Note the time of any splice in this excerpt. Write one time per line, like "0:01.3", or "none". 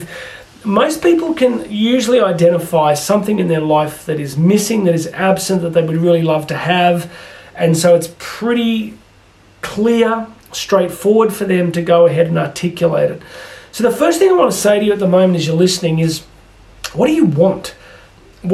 none